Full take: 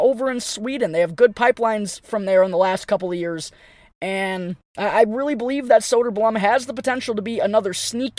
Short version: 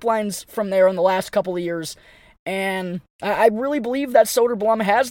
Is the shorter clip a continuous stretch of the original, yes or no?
yes